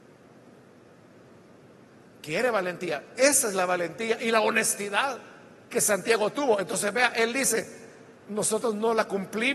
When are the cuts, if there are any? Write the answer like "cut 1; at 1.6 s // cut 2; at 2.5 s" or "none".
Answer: none